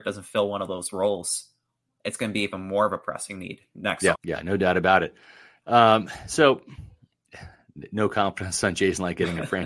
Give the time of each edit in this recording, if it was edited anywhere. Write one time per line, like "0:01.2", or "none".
0:04.1